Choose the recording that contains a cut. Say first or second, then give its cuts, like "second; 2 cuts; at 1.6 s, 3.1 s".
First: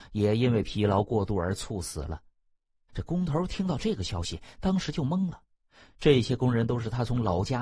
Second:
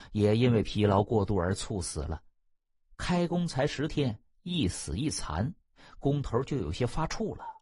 first; 1 cut; at 2.9 s